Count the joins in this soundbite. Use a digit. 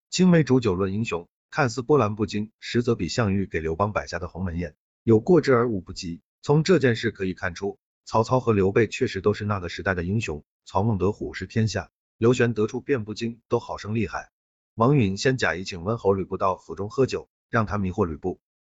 2